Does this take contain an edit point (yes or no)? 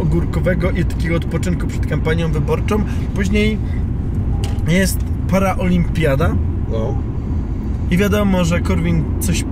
yes